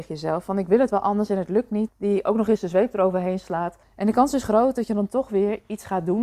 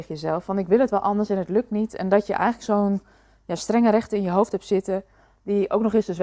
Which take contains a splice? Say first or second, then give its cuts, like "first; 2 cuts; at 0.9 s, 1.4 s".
first; 2 cuts; at 1.9 s, 3.8 s